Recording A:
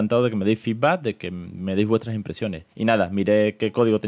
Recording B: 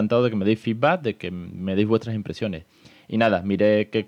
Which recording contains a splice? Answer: A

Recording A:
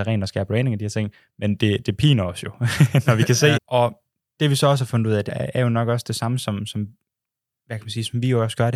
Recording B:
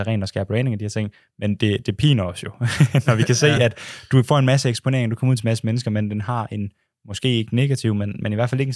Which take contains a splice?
A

